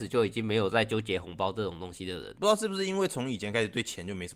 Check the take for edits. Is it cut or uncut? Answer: cut